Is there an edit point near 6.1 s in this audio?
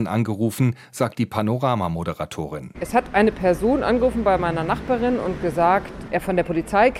yes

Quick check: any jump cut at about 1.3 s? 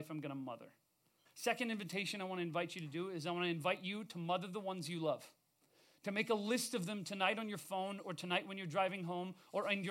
yes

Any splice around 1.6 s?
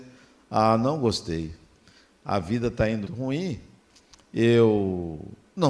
no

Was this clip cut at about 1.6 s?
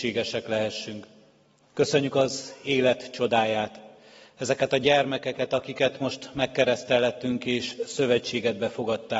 yes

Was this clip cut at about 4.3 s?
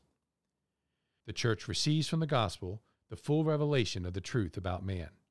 no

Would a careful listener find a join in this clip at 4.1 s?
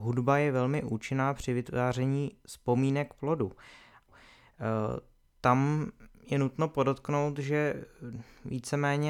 yes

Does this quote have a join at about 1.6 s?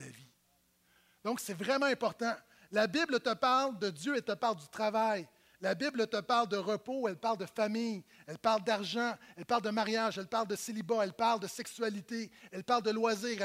no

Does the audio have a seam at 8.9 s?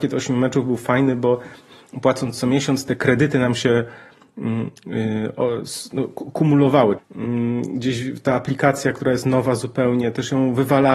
no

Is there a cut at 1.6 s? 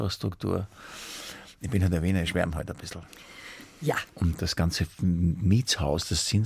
no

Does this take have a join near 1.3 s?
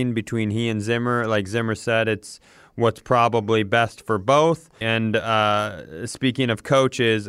no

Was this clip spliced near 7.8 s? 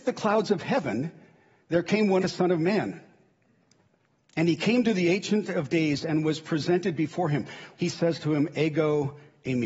yes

